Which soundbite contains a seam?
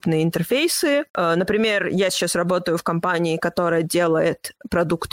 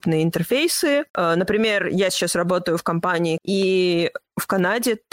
second; 1 cut; at 3.4 s

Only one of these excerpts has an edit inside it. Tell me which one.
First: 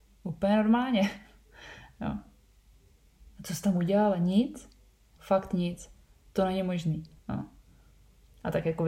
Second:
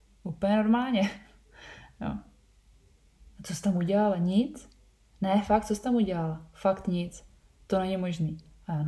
first; 2 cuts; at 5.2 s, 7.2 s

